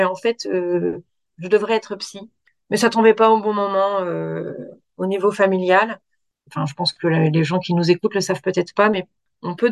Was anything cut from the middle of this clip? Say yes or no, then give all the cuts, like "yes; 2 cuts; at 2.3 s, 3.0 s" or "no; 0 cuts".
no; 0 cuts